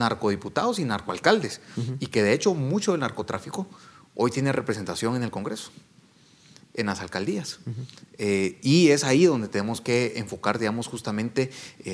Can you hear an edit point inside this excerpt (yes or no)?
no